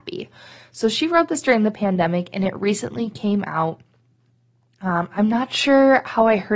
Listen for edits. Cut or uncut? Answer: uncut